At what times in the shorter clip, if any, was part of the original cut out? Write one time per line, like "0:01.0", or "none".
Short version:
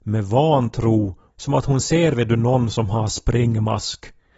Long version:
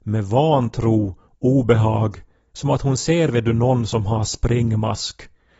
0:01.3